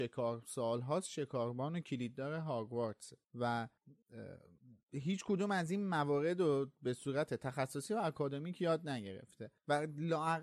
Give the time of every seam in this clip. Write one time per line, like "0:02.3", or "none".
none